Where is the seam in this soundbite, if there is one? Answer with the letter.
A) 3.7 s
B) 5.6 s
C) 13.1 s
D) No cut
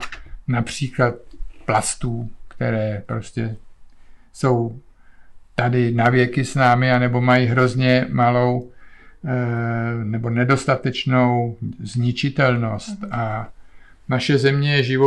D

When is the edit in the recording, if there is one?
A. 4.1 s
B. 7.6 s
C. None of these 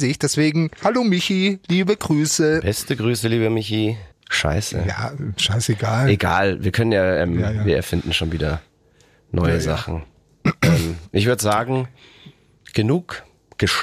A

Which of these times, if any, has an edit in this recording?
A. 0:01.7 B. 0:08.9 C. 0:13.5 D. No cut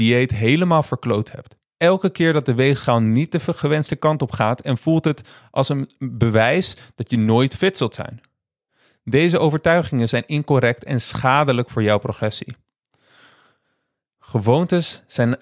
A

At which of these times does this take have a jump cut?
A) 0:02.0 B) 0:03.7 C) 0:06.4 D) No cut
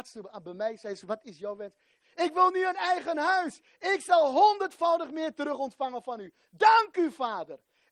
A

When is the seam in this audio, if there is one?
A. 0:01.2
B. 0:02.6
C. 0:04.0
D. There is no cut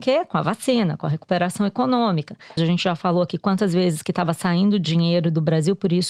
B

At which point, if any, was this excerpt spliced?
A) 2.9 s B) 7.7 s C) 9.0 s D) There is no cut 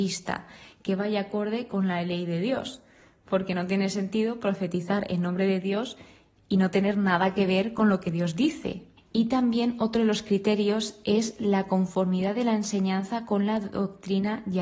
C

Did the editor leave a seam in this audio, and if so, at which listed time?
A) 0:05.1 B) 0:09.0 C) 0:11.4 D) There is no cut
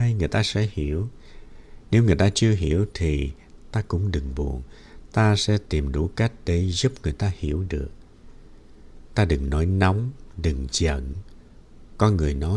D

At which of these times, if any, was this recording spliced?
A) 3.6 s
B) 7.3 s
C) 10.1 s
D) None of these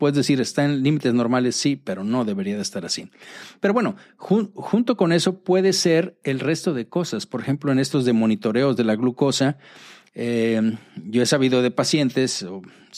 D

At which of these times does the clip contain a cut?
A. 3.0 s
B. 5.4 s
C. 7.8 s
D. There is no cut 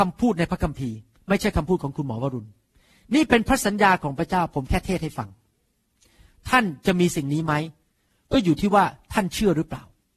D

